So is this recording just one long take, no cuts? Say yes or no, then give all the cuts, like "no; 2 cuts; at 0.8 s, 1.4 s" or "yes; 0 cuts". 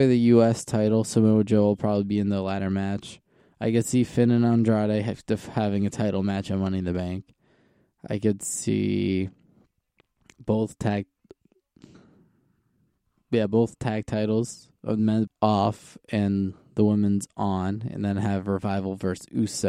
no; 1 cut; at 15.3 s